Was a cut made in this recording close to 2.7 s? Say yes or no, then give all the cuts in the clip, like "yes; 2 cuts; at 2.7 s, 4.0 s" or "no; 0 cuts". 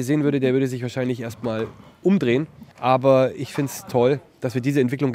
yes; 1 cut; at 2.7 s